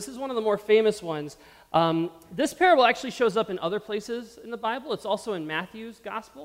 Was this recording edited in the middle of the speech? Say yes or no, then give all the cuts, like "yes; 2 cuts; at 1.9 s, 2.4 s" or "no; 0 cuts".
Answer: no; 0 cuts